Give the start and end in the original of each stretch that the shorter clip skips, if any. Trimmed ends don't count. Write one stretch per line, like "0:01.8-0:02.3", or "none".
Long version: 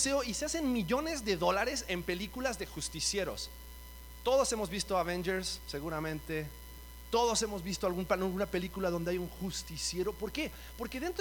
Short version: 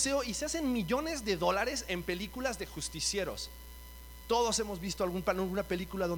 0:04.2-0:07.0